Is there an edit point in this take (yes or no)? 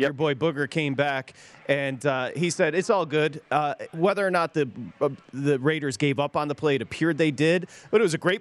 no